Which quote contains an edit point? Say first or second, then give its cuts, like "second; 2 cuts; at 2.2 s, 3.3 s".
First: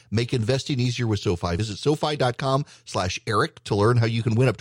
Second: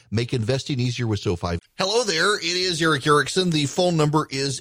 second; 1 cut; at 1.6 s